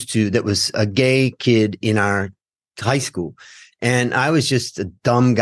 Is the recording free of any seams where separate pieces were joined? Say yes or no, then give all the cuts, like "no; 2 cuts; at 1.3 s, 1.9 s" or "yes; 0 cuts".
yes; 0 cuts